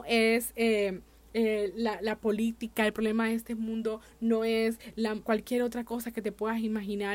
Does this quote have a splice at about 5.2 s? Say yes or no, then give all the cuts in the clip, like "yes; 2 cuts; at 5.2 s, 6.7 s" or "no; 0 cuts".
yes; 1 cut; at 5.2 s